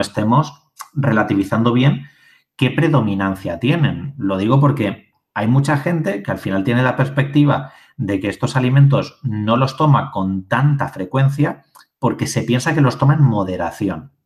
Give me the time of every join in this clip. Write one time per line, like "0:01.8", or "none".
none